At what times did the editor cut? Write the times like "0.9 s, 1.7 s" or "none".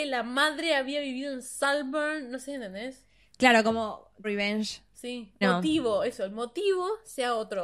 4.2 s, 5.4 s